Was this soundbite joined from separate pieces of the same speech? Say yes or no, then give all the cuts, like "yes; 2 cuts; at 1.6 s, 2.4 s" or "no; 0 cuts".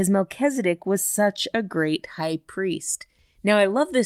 no; 0 cuts